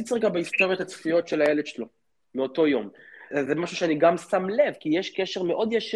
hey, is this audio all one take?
no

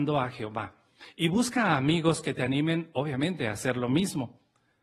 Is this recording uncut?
yes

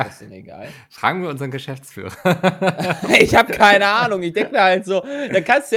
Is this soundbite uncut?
yes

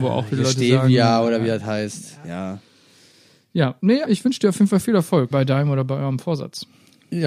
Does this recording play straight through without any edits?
no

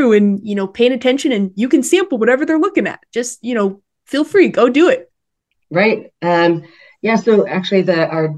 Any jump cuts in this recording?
no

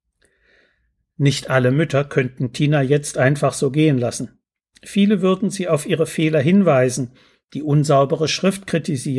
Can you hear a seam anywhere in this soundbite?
no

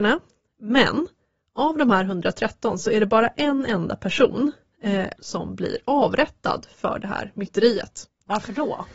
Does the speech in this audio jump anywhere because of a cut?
yes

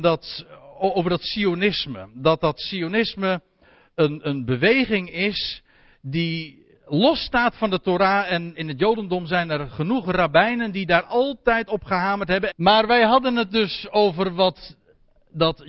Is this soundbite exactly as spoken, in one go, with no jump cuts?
no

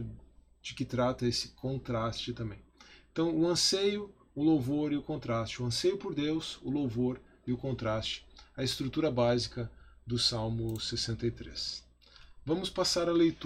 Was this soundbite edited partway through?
no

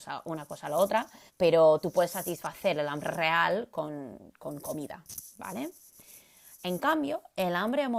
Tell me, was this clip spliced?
yes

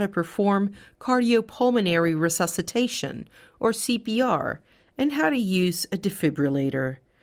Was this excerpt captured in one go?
yes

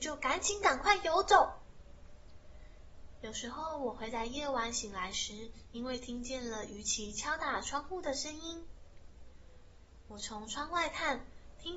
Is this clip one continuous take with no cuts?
yes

